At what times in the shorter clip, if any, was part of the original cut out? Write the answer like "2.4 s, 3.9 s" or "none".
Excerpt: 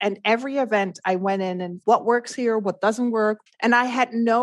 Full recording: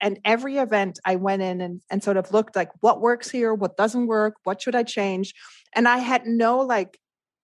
1.8 s, 3.5 s